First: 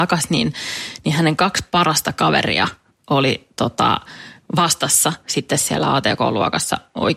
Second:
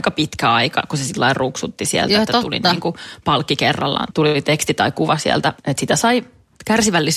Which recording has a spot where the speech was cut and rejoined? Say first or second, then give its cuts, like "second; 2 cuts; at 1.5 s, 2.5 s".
second; 1 cut; at 4.1 s